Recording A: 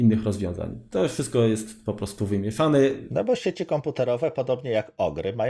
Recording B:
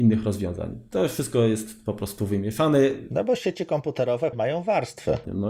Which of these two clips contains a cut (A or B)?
B